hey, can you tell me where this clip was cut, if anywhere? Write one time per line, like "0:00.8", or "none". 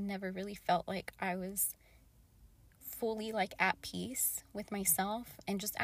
none